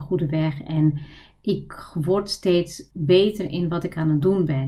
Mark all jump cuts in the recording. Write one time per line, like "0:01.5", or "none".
0:02.9